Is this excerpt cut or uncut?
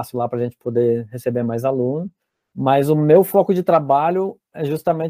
uncut